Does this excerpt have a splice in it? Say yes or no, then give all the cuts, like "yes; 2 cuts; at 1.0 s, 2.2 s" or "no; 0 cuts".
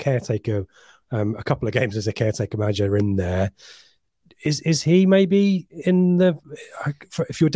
no; 0 cuts